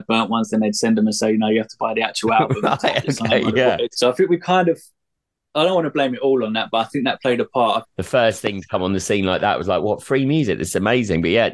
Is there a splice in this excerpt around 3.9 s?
yes; 2 cuts; at 3.9 s, 7.8 s

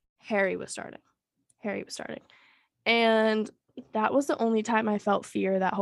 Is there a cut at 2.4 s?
no; 0 cuts

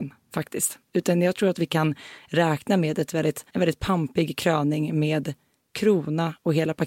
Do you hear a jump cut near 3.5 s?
yes; 1 cut; at 3.5 s

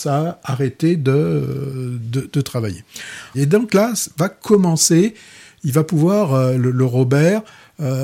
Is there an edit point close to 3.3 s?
yes; 1 cut; at 3.3 s

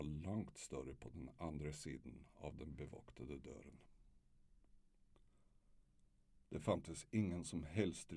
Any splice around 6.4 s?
no; 0 cuts

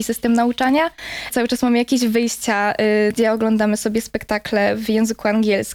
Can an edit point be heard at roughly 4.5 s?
no; 2 cuts; at 1.3 s, 3.1 s

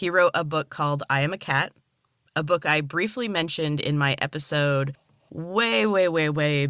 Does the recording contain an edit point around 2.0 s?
no; 0 cuts

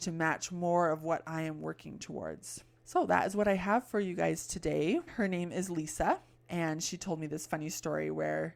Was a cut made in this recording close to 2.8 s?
no; 1 cut; at 5.1 s

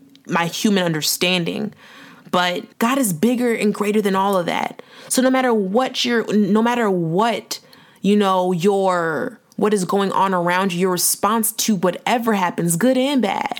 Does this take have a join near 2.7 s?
yes; 1 cut; at 2.7 s

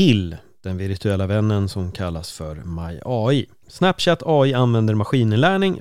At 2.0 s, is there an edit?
no; 1 cut; at 3.6 s

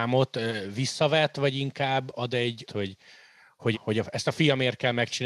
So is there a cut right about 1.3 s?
no; 2 cuts; at 2.7 s, 3.7 s

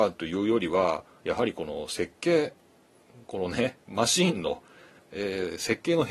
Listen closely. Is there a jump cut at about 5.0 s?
yes; 1 cut; at 5.0 s

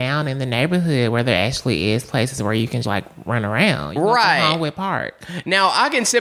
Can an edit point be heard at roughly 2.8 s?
yes; 1 cut; at 2.8 s

